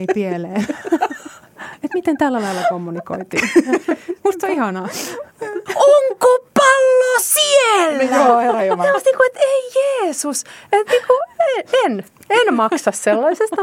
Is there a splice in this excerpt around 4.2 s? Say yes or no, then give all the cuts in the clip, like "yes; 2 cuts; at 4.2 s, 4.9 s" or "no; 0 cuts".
no; 1 cut; at 5.7 s